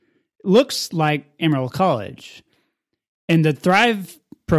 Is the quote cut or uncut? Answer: uncut